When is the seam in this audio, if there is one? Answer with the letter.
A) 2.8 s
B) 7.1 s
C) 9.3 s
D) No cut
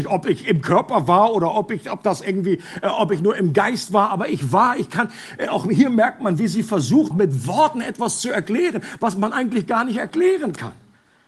B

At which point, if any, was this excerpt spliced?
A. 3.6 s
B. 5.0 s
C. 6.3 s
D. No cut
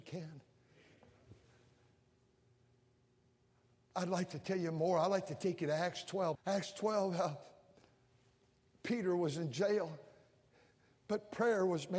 C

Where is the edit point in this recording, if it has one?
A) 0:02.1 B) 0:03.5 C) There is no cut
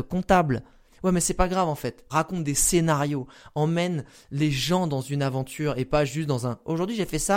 A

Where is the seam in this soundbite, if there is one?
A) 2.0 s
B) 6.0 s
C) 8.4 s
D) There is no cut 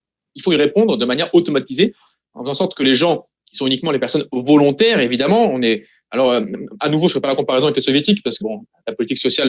C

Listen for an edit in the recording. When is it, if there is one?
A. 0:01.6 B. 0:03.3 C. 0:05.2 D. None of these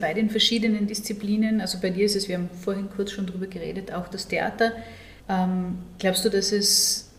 C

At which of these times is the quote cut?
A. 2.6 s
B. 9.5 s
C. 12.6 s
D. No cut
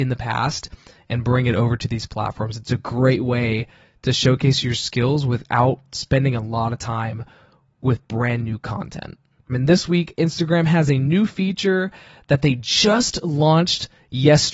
B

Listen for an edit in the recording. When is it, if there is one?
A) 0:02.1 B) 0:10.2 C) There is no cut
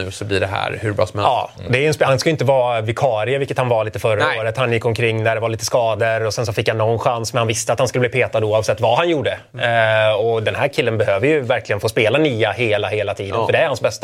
C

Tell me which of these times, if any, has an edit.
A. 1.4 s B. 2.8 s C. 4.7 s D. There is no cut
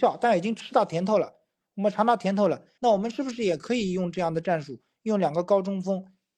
B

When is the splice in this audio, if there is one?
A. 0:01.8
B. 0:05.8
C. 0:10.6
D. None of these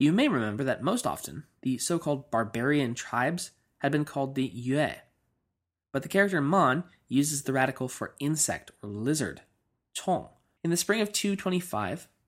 C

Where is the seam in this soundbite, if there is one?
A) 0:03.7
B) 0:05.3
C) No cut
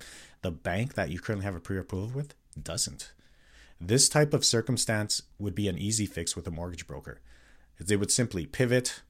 B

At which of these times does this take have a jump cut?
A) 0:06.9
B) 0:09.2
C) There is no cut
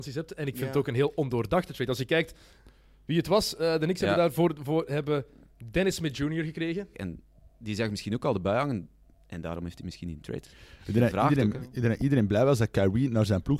A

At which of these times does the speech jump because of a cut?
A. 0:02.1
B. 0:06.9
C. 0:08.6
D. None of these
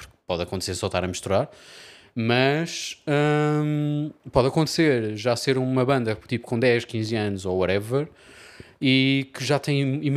D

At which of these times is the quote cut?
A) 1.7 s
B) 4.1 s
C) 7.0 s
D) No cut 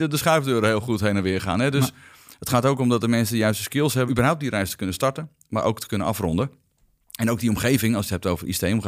B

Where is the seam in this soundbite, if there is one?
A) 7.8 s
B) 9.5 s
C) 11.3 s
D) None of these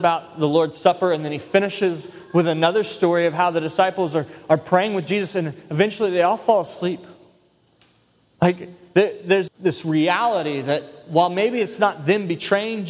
B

